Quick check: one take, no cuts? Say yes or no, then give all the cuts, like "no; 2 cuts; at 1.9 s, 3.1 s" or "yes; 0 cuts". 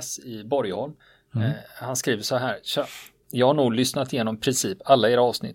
yes; 0 cuts